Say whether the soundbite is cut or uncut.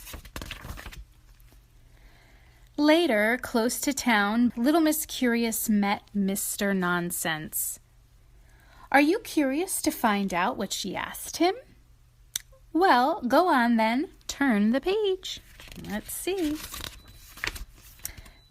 cut